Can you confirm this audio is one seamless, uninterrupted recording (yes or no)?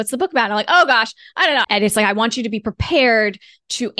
no